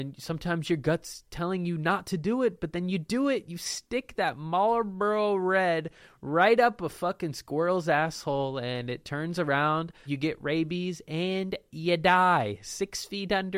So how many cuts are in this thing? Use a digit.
1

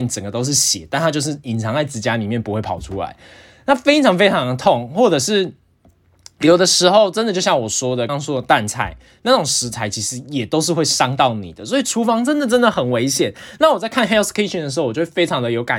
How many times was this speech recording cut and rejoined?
1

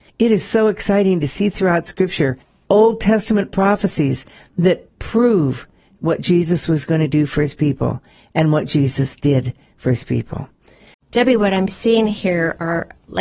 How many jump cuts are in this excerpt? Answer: 0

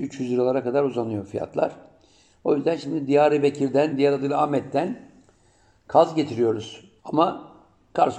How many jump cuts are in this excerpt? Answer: 2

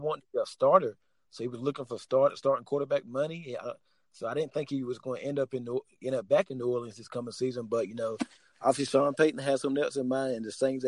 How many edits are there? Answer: 0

